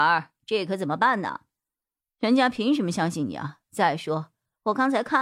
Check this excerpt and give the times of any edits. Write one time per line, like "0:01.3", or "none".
0:02.0